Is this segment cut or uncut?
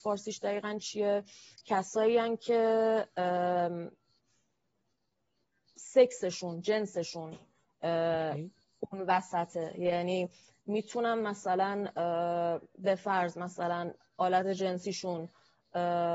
uncut